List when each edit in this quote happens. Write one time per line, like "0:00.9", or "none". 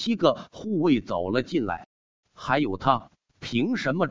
0:02.2